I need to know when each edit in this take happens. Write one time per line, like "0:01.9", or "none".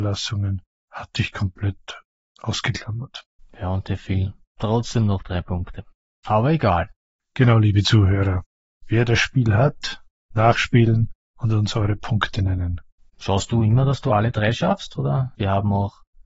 0:13.1
0:15.4